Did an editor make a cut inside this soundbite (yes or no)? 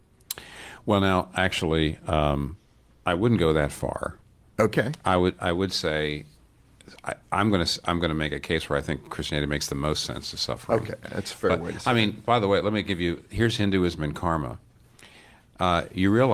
no